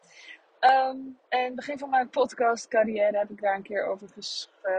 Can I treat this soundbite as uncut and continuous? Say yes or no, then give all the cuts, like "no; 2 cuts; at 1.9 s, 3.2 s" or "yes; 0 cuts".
no; 1 cut; at 1.2 s